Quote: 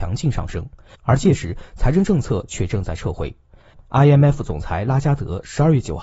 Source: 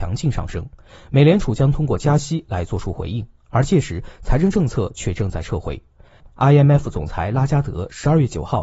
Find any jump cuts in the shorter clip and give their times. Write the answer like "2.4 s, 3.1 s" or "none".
0.9 s